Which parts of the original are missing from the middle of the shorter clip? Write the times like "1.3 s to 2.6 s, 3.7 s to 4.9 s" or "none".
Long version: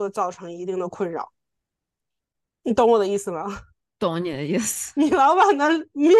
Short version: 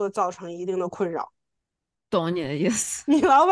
1.9 s to 3.8 s